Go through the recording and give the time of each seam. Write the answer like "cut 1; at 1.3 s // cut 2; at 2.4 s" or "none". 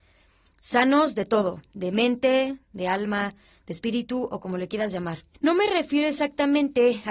cut 1; at 2.6 s // cut 2; at 5.3 s